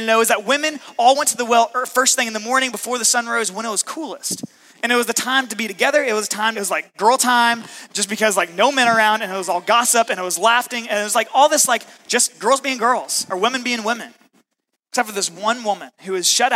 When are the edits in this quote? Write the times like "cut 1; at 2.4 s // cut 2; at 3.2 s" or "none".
cut 1; at 6.5 s // cut 2; at 14.7 s